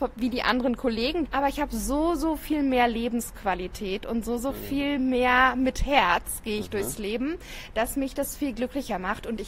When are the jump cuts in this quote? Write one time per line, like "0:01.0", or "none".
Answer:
0:01.2